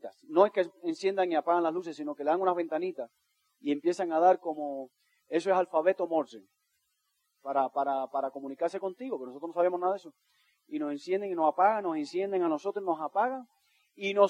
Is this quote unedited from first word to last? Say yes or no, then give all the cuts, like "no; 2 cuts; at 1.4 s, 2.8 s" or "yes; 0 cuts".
yes; 0 cuts